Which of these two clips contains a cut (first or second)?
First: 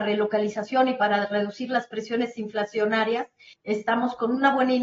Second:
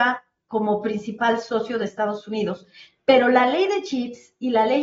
first